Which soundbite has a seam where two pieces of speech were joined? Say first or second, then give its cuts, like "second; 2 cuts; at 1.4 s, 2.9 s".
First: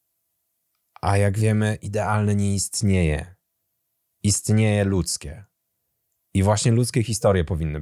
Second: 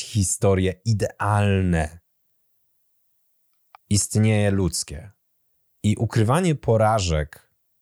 second; 2 cuts; at 3.8 s, 5.8 s